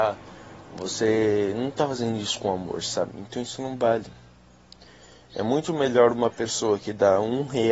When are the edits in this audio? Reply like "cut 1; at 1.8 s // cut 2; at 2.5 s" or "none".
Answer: none